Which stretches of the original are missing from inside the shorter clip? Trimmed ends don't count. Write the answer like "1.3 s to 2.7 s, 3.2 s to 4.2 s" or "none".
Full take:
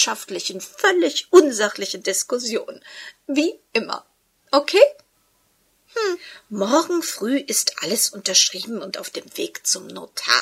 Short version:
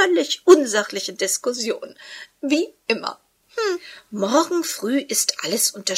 4.3 s to 5.8 s